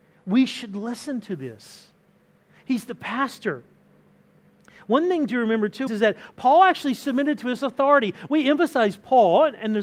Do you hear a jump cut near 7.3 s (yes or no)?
no